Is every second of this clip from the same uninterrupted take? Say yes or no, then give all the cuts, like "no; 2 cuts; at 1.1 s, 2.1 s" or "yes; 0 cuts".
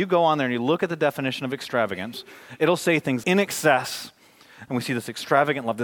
no; 2 cuts; at 3.2 s, 4.7 s